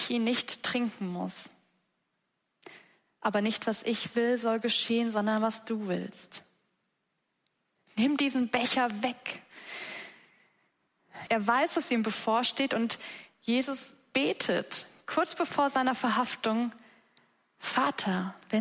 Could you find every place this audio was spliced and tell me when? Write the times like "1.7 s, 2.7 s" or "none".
11.3 s